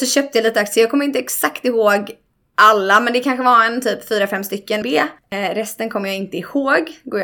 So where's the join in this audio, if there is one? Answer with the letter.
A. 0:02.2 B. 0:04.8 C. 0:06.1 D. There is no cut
B